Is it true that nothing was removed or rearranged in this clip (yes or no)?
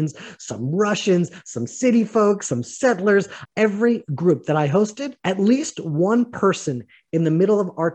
no